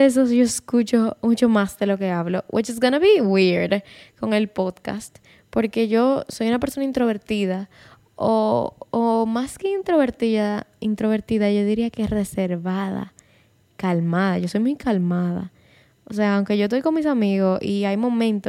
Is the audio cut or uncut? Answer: uncut